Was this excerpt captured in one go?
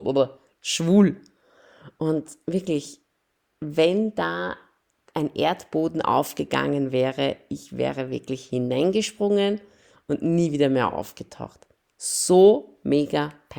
yes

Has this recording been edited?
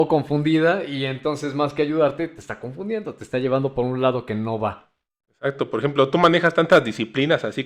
no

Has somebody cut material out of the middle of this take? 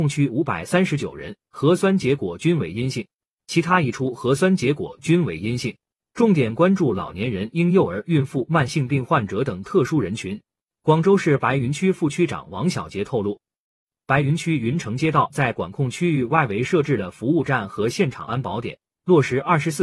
no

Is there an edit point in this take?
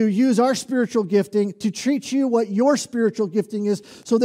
no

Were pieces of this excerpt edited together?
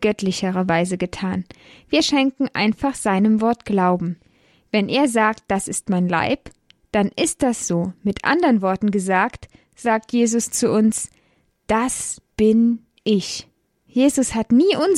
no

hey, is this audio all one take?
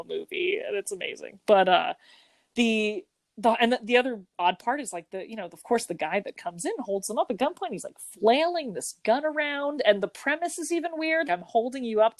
no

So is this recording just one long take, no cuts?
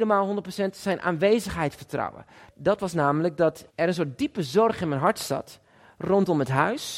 no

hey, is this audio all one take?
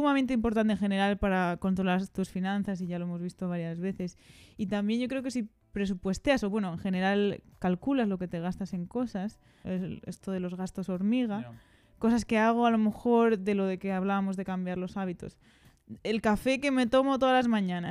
no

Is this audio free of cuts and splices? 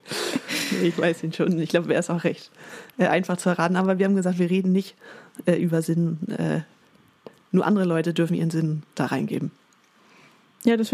yes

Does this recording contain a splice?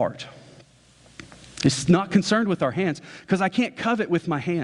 no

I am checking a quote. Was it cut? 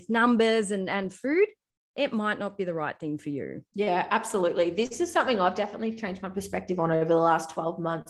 yes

